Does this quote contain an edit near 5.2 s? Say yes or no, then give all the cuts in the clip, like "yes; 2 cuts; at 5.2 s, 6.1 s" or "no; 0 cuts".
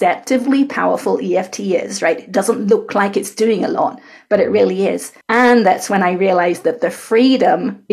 yes; 1 cut; at 5.2 s